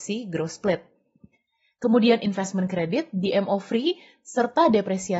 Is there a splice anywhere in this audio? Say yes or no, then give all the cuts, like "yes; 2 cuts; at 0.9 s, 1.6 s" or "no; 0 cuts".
no; 0 cuts